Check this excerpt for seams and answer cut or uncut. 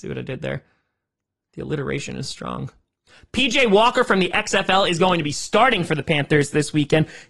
uncut